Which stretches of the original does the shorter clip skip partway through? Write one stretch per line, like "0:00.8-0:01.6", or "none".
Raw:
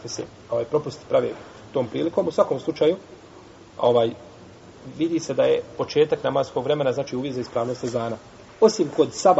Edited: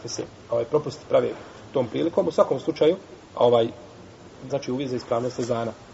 0:03.2-0:03.7
0:04.9-0:06.9